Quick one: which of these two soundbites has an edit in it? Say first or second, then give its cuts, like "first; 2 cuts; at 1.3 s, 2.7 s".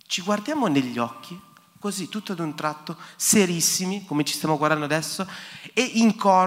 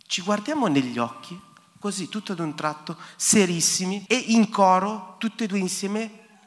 second; 1 cut; at 4.1 s